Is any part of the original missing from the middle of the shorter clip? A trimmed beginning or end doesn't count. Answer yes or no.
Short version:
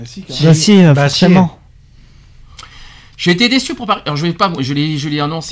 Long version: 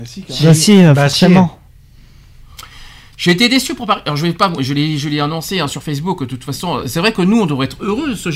no